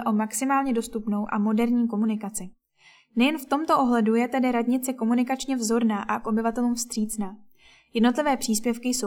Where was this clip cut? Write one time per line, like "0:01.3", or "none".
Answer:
none